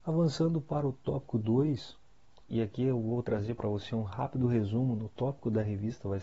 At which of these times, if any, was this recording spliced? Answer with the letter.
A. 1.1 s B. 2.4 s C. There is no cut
B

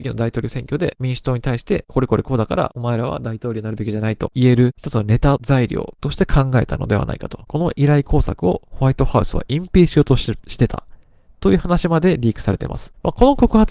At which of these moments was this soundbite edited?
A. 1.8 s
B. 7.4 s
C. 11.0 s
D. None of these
B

